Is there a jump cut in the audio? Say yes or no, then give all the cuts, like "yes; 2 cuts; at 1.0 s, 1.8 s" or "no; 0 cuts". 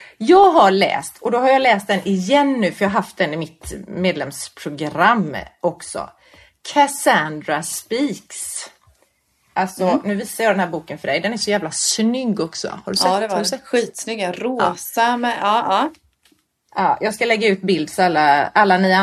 no; 0 cuts